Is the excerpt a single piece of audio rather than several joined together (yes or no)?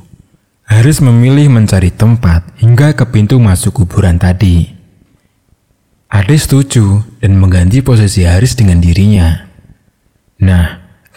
yes